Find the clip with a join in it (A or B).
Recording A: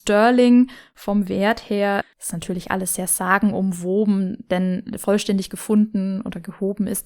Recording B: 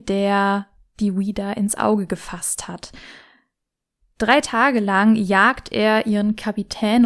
A